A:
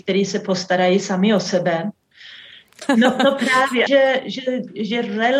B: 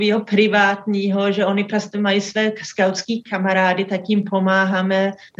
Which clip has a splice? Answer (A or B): A